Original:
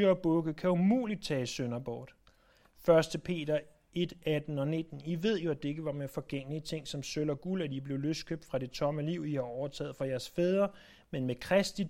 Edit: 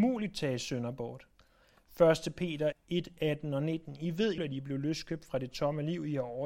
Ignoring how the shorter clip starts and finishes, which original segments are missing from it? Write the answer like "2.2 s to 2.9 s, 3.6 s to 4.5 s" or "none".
3.6 s to 3.8 s, 5.4 s to 7.6 s